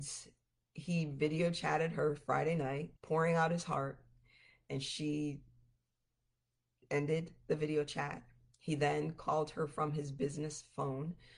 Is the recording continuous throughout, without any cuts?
no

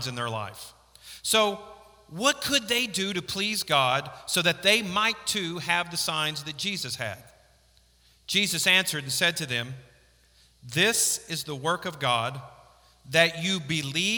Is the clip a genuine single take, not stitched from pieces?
yes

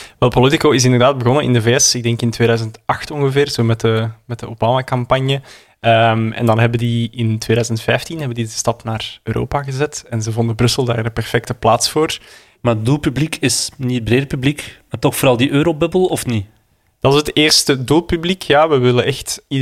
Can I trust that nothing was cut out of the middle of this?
no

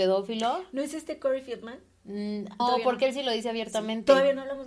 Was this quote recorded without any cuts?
no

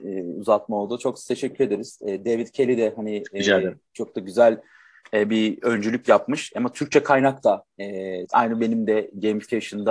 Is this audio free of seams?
no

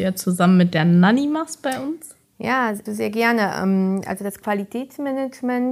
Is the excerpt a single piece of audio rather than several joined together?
no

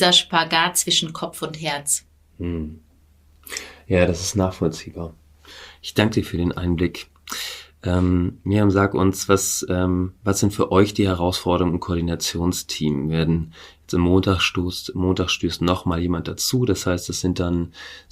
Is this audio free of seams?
yes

